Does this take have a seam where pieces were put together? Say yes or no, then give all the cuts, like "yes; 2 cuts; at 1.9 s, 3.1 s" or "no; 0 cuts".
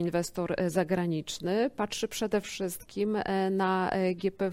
no; 0 cuts